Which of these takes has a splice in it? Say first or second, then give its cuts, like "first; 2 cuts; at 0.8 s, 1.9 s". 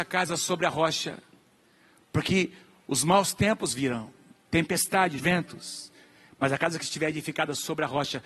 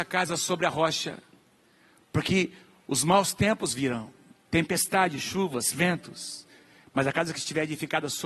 first; 1 cut; at 5.2 s